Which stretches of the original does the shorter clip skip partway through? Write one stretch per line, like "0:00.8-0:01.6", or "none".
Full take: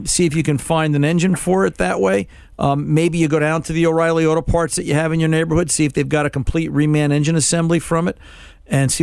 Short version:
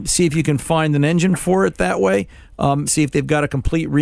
0:02.9-0:05.7

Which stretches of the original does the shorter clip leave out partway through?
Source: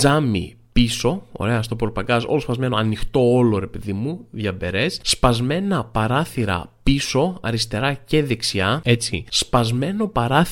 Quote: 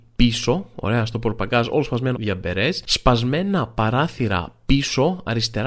0:02.7-0:04.3

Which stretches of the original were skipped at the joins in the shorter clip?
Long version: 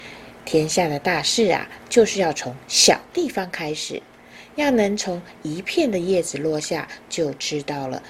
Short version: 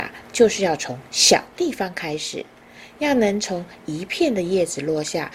none

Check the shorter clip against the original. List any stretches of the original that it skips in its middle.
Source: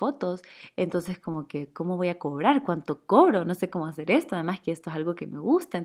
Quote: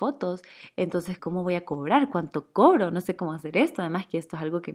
0:01.2-0:01.7

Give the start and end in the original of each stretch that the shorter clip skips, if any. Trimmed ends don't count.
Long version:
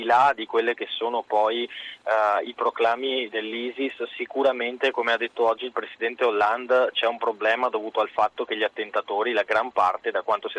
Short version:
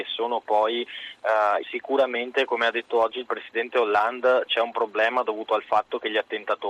0:02.4-0:04.1

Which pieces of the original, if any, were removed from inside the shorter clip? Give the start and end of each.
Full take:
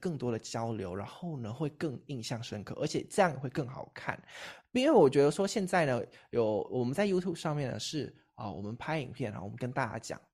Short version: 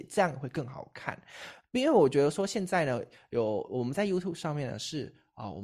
none

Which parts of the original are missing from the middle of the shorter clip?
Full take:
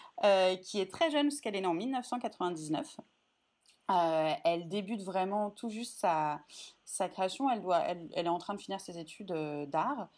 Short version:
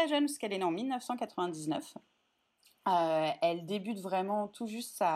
none

